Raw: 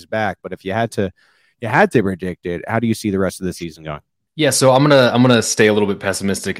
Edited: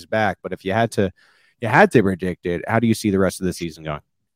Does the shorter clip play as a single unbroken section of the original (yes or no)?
yes